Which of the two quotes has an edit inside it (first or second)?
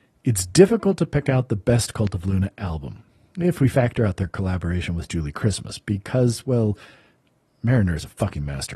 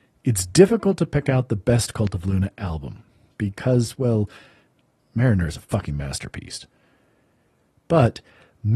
second